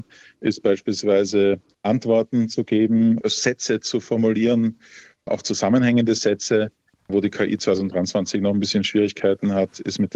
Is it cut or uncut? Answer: uncut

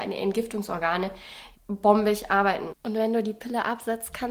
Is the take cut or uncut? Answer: cut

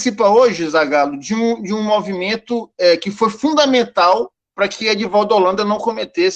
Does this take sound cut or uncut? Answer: uncut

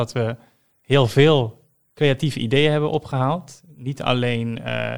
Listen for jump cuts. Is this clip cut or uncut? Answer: uncut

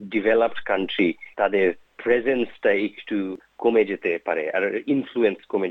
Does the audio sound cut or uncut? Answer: cut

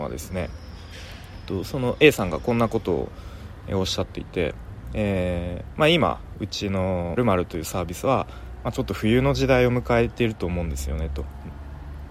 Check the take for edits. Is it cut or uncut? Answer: cut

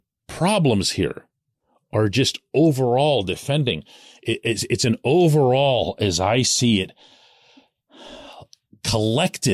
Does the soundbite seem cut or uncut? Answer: uncut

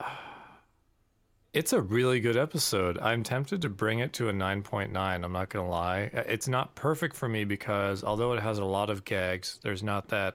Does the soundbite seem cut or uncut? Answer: uncut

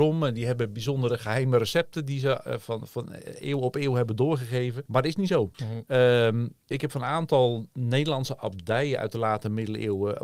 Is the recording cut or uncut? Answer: cut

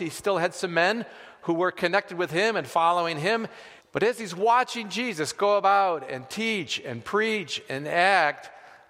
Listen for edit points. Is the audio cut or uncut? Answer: cut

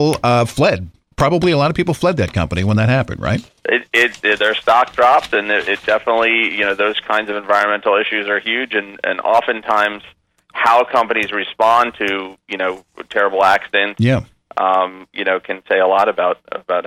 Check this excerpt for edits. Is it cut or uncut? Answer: uncut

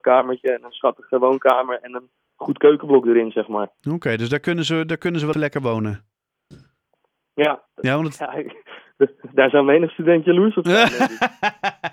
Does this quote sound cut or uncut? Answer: cut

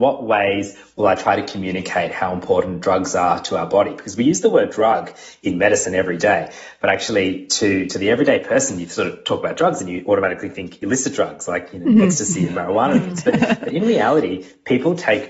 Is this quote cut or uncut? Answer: uncut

